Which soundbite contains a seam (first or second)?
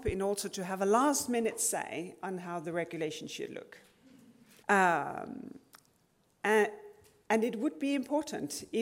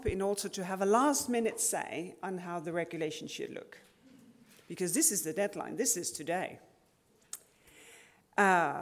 first